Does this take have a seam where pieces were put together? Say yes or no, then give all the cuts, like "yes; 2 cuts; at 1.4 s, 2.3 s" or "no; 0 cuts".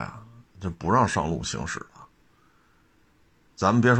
no; 0 cuts